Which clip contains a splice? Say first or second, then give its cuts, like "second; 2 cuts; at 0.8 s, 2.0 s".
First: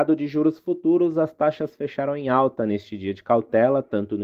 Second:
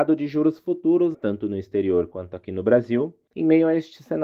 second; 2 cuts; at 1.1 s, 3.3 s